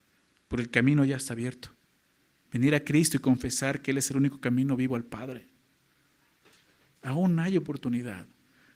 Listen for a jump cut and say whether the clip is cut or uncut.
cut